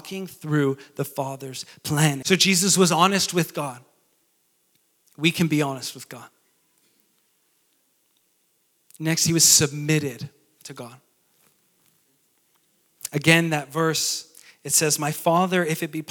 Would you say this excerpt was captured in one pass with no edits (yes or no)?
no